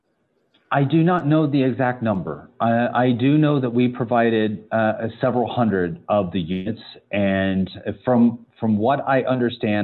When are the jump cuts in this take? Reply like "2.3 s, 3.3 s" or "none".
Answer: 8.4 s